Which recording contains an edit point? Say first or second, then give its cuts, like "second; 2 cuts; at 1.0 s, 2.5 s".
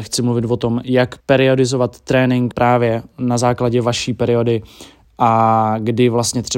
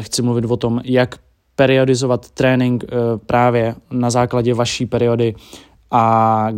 first; 2 cuts; at 1.2 s, 2.5 s